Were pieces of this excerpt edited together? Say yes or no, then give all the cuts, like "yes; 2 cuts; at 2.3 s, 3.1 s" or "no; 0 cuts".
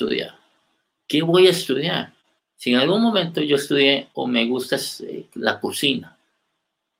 yes; 2 cuts; at 2.4 s, 4.1 s